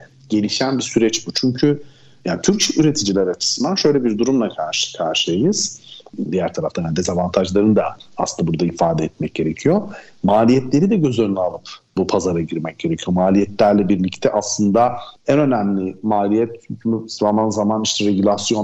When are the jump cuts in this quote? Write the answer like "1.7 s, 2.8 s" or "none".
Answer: 6.3 s

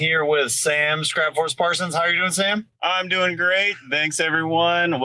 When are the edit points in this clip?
none

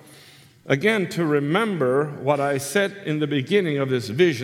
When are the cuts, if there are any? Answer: none

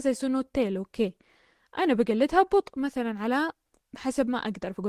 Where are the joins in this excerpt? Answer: none

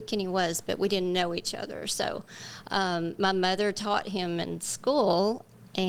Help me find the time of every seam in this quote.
none

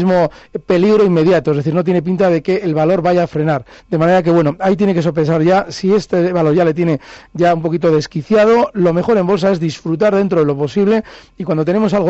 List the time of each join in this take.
3.8 s

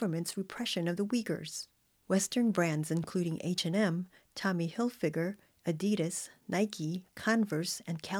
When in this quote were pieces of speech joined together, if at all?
none

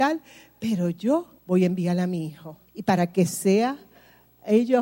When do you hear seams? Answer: 1.4 s, 2.7 s

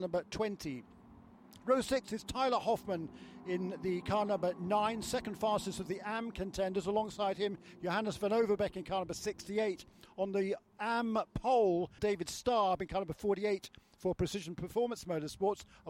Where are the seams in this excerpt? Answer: 12.0 s

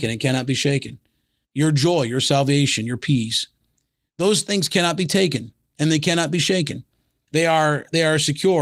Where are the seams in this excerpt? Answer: 7.3 s

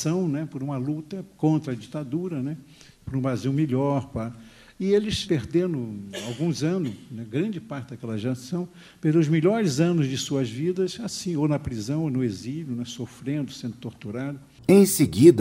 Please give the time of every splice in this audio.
5.3 s

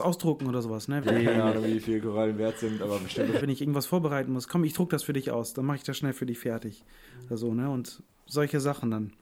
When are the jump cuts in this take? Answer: 1.0 s, 3.4 s

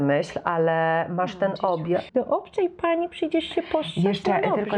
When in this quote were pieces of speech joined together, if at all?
2.1 s

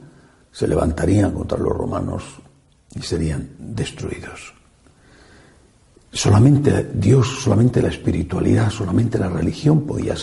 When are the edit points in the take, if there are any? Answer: none

